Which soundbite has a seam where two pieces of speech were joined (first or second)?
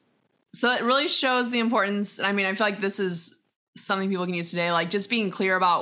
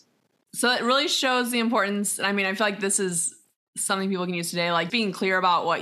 second